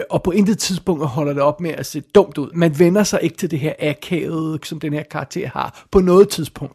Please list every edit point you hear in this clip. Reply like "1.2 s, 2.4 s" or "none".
2.5 s, 4.6 s